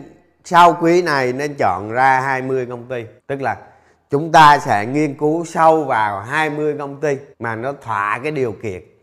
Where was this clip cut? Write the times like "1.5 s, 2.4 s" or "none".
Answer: 3.2 s, 7.3 s

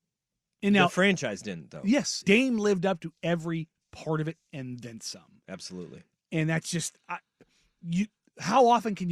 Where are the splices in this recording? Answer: 2.2 s

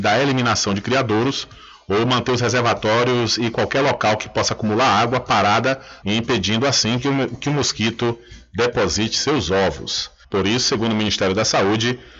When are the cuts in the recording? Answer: 6.0 s, 10.2 s

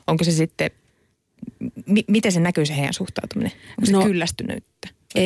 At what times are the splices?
none

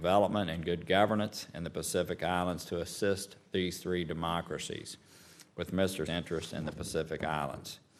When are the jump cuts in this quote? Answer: 6.1 s

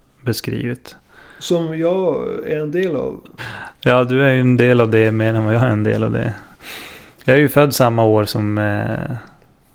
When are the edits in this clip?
3.4 s

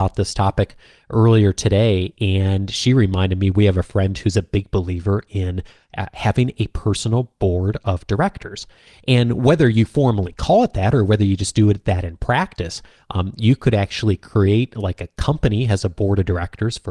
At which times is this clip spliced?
none

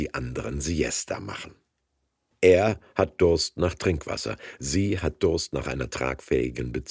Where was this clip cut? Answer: 2.3 s

